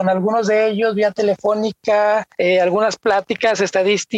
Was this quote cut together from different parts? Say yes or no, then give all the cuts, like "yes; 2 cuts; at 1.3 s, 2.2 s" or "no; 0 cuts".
yes; 1 cut; at 2.3 s